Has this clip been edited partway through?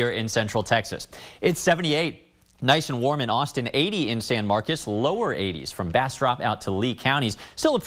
no; 0 cuts

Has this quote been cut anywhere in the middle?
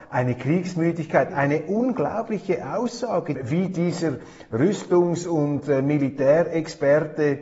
yes; 2 cuts; at 1.3 s, 3.3 s

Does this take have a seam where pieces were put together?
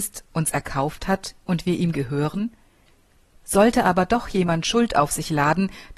yes; 1 cut; at 3.3 s

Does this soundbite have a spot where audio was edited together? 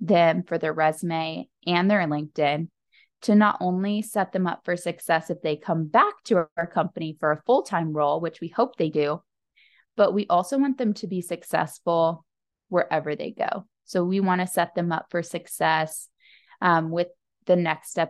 no; 0 cuts

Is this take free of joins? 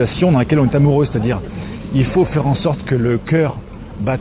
yes; 0 cuts

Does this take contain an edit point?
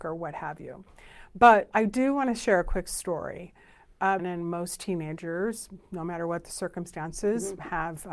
yes; 1 cut; at 4.2 s

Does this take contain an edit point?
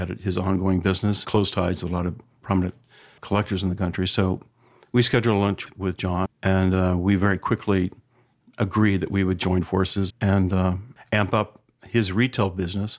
yes; 3 cuts; at 1.2 s, 6.3 s, 10.1 s

